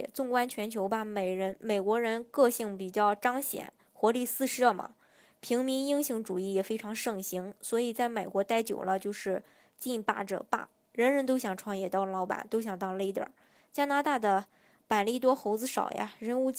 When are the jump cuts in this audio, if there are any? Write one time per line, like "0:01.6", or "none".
none